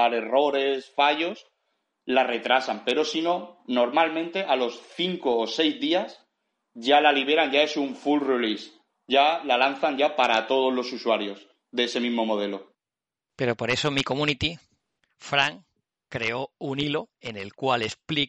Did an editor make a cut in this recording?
no; 0 cuts

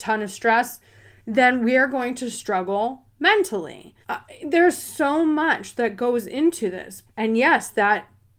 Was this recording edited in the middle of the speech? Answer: yes; 2 cuts; at 4.0 s, 7.1 s

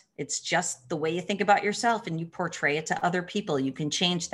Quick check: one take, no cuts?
yes; 0 cuts

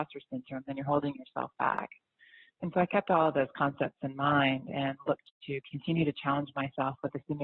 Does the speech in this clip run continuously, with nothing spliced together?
yes; 0 cuts

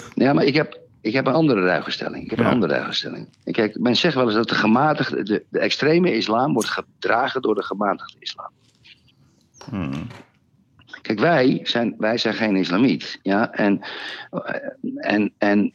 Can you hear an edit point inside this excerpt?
no; 0 cuts

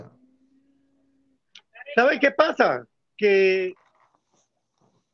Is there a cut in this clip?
no; 0 cuts

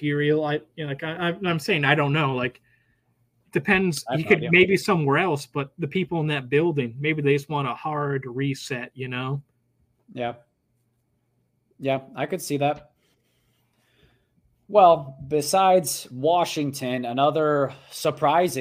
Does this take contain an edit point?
no; 0 cuts

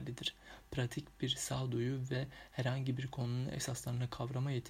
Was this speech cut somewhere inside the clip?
no; 0 cuts

